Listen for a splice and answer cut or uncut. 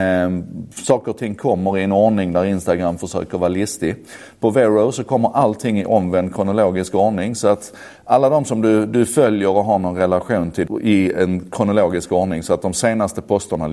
cut